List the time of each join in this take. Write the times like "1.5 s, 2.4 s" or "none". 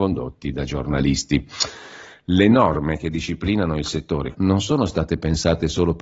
4.3 s